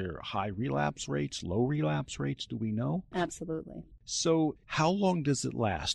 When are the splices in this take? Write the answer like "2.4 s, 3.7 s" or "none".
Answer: 3.1 s, 4.6 s